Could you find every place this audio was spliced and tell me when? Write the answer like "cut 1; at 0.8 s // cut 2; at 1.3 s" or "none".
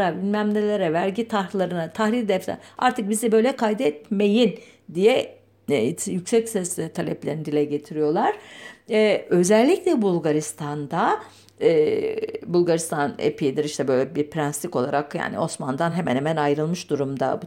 none